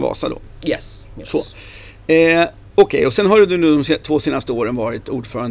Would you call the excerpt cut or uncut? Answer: uncut